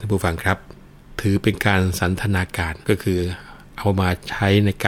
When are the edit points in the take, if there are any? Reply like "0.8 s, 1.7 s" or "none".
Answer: 2.8 s